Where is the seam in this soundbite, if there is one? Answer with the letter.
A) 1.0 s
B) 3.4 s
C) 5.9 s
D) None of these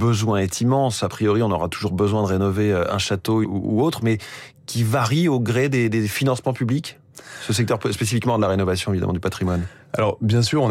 B